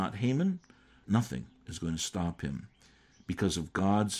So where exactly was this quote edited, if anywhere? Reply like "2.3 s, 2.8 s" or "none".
1.0 s